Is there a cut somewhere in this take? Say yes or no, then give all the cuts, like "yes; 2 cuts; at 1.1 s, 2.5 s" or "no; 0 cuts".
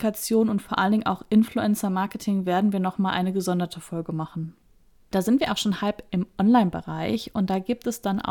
no; 0 cuts